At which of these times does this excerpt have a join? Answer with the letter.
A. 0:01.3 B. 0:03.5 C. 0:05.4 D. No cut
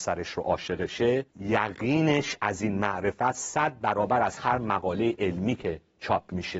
A